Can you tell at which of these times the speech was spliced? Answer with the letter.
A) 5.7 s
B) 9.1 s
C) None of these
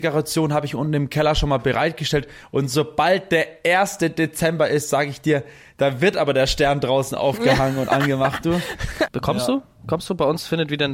B